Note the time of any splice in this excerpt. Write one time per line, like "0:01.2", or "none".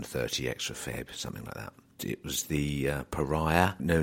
0:02.0